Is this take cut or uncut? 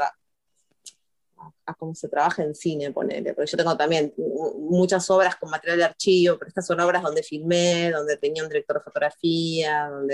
uncut